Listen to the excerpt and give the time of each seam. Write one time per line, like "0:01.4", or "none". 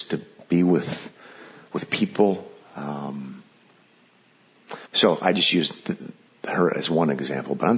0:04.9

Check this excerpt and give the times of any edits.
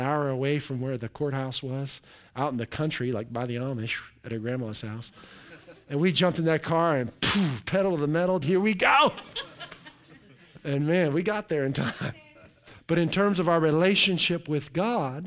0:08.4
0:12.8

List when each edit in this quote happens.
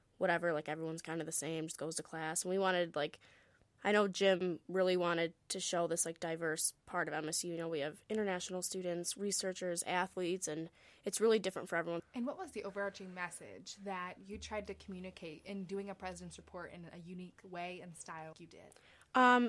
0:12.0
0:18.3

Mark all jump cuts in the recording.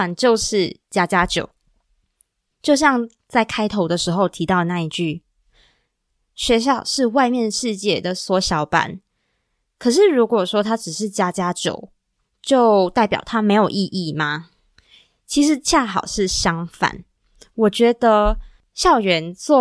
none

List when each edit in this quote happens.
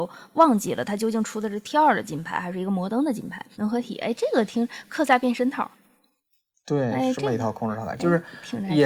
0:03.5

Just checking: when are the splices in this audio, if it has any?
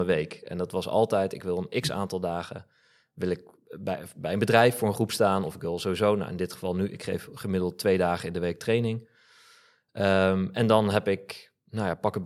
none

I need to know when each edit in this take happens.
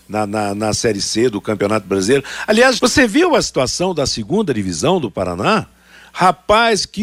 0:02.8

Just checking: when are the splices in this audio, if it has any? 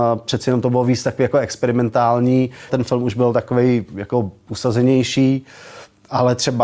0:02.7

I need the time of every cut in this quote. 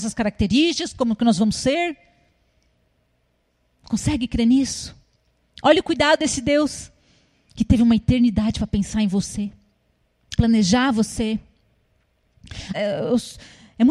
0:10.4
0:12.7

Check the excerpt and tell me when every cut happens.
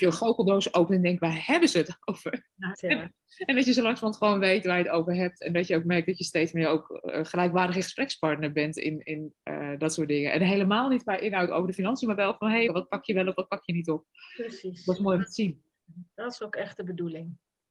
0:02.7
0:12.7

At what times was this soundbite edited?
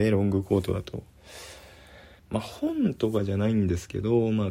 0:02.2

